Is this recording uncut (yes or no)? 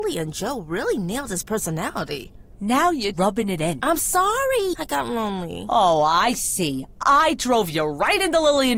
no